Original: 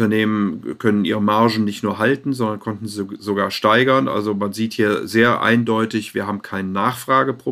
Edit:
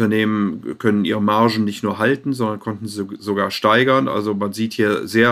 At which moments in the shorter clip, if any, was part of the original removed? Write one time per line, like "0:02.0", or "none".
none

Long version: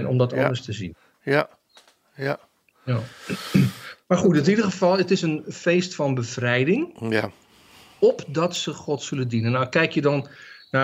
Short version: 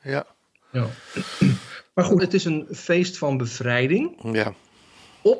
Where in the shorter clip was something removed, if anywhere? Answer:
0:02.2

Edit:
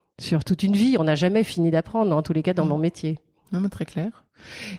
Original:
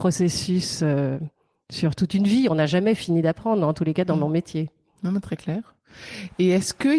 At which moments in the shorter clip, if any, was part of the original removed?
none

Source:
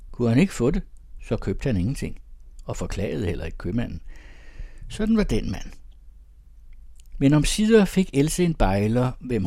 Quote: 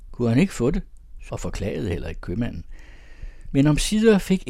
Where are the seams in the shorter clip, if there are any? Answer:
0:01.3
0:03.4

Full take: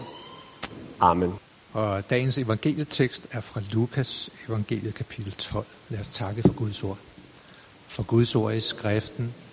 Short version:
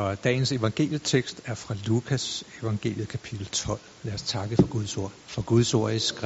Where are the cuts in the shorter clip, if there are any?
0:05.2

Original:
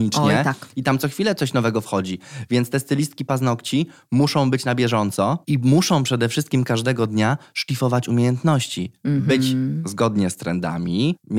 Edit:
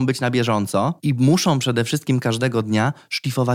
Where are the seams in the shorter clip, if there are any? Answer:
none

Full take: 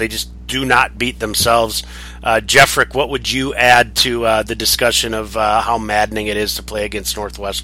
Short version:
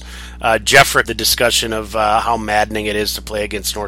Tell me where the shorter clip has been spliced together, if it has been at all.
0:01.0

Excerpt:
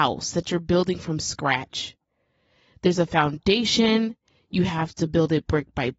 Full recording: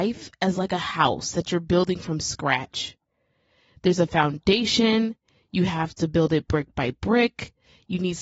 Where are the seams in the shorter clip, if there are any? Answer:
none

